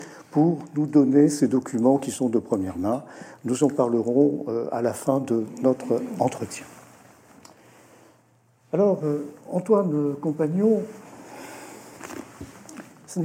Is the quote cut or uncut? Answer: uncut